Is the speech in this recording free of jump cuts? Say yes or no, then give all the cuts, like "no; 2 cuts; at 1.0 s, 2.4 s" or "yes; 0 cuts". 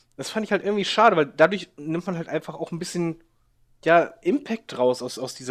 yes; 0 cuts